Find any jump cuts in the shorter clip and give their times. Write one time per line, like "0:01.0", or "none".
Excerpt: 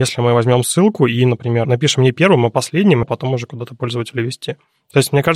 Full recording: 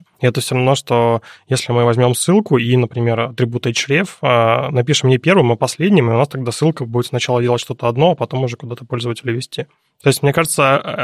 0:01.6
0:03.0

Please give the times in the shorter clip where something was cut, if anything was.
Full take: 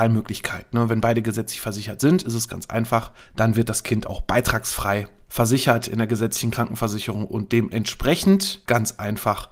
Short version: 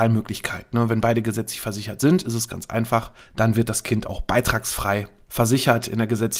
none

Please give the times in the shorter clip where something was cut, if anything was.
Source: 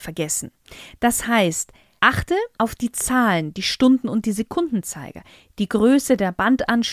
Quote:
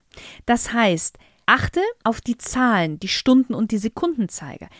none

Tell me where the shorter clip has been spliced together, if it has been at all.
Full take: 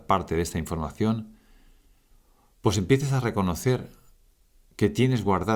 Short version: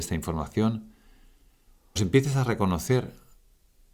0:02.0

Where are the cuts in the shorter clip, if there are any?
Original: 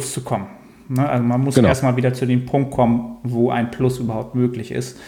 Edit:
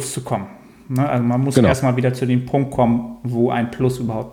none

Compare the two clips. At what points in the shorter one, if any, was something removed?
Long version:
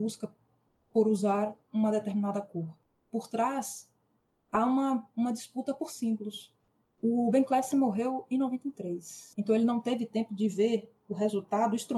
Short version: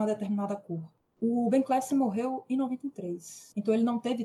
0:01.1

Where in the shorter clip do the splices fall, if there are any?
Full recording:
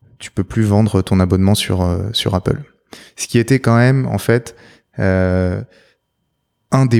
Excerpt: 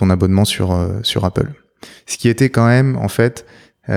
none

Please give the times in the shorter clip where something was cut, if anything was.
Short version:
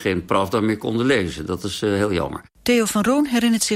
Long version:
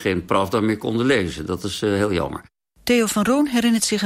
0:02.5

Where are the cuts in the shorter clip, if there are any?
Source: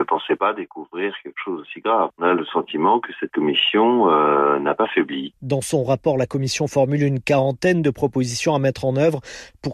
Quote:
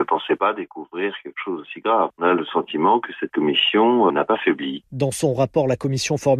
0:04.1

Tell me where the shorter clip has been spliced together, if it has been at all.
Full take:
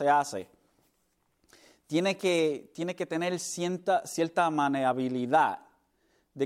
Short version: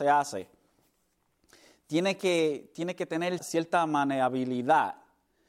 0:03.4

